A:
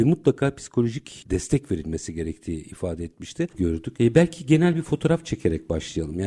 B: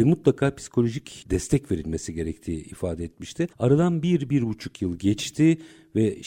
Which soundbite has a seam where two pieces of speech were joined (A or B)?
A